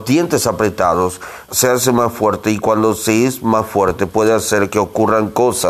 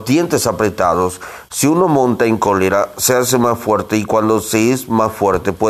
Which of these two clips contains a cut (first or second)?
first